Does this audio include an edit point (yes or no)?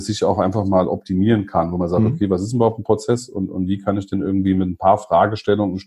no